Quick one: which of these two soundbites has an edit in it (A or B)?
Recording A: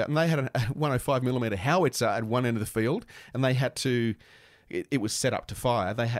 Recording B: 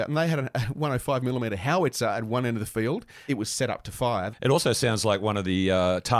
B